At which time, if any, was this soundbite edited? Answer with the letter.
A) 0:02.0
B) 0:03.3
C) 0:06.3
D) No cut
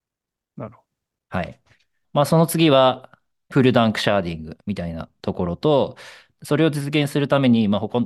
A